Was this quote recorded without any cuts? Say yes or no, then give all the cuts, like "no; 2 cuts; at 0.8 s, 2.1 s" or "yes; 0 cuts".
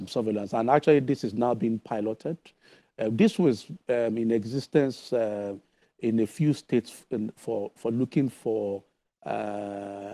yes; 0 cuts